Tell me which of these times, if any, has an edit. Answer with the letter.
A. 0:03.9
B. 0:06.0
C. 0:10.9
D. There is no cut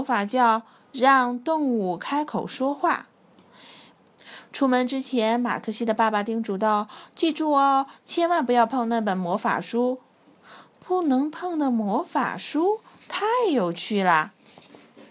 A